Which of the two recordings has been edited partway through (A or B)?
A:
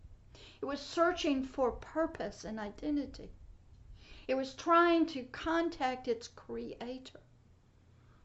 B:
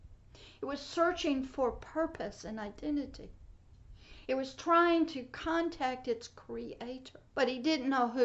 B